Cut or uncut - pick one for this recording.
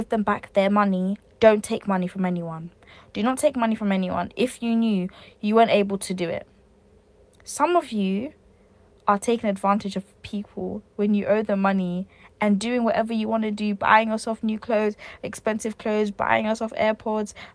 uncut